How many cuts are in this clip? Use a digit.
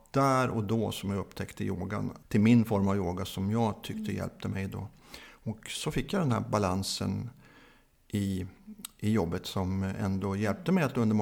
1